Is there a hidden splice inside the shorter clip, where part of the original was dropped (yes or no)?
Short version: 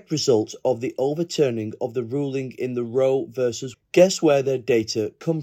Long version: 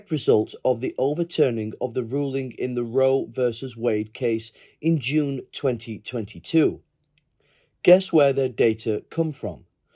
yes